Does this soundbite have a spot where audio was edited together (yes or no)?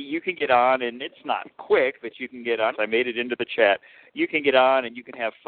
yes